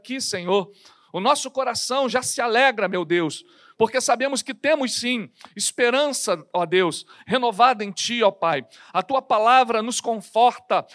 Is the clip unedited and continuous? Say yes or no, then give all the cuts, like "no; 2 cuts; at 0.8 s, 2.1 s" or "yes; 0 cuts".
yes; 0 cuts